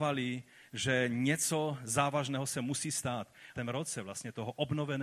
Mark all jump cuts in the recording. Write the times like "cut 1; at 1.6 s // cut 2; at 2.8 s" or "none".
cut 1; at 3.5 s